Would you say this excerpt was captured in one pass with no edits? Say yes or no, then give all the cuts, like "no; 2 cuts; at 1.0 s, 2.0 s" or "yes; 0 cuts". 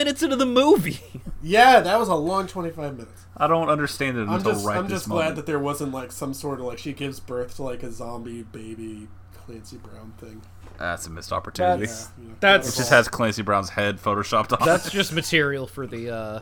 no; 1 cut; at 3.3 s